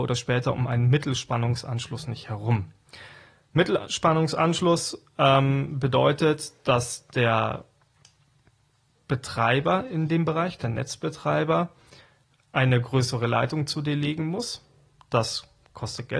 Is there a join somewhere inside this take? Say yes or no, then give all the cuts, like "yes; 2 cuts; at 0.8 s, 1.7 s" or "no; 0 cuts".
no; 0 cuts